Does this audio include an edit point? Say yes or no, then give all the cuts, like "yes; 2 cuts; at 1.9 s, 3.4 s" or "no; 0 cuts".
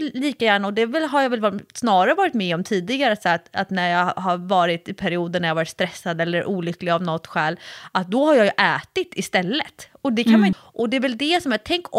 yes; 1 cut; at 10.5 s